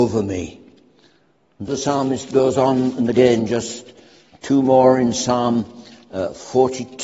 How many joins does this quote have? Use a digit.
1